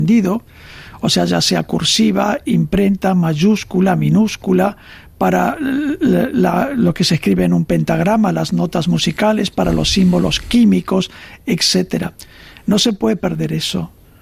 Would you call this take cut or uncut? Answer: uncut